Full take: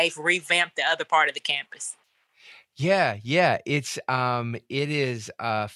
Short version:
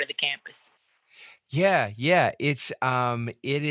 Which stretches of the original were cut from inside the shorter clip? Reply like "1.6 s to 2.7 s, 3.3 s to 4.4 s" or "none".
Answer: none